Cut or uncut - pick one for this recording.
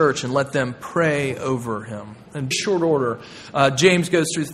cut